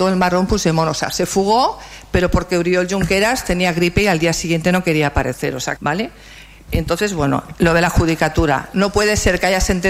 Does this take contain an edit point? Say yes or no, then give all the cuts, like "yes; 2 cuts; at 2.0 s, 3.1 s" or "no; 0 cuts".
yes; 1 cut; at 5.8 s